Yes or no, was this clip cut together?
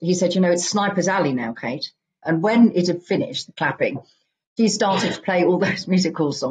yes